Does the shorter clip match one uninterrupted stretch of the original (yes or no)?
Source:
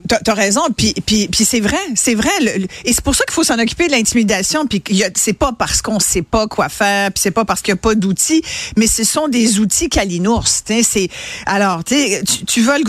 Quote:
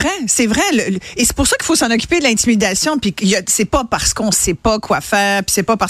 yes